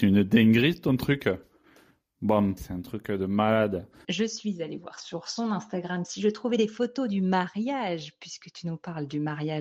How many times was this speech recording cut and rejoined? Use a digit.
2